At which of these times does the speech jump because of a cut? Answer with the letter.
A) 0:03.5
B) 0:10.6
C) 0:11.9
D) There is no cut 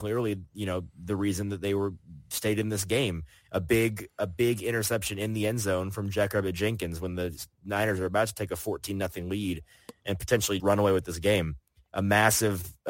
B